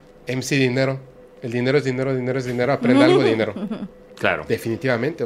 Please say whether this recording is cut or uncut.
uncut